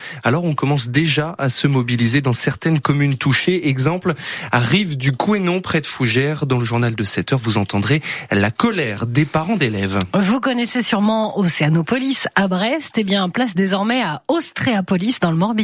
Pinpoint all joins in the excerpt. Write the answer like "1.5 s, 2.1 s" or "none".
none

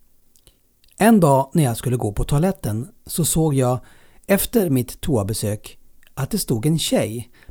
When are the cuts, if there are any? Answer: none

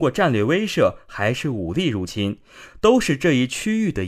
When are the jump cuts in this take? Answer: 2.7 s

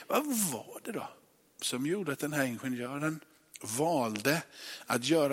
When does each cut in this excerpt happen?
none

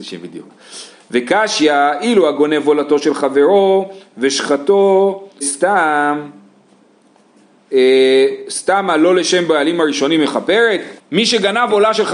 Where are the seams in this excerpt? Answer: 5.4 s, 11.0 s

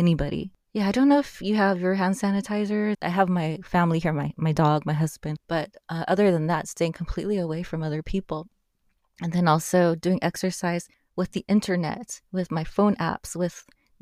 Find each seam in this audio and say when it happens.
2.9 s

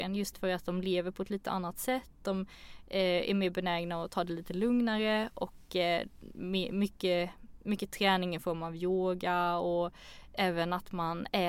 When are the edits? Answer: none

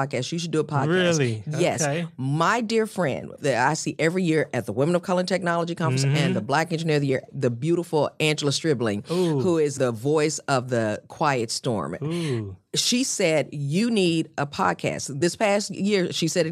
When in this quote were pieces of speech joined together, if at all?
none

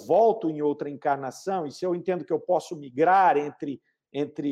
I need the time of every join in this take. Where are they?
none

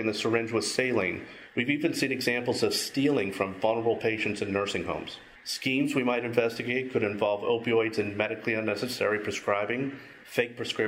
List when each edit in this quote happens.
1.5 s, 5.4 s

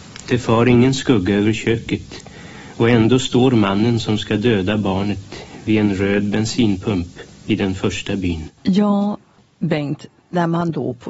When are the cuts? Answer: 8.6 s

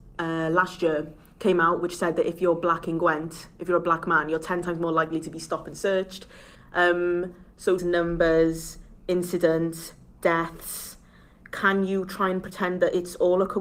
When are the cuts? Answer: 6.5 s, 7.8 s

